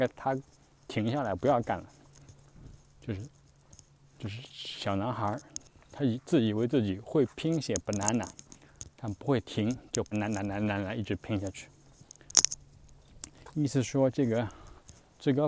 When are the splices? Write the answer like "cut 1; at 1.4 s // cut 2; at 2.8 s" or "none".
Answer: cut 1; at 10.1 s // cut 2; at 13.5 s